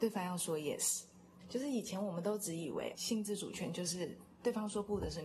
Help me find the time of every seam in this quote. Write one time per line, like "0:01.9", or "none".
0:01.4
0:02.9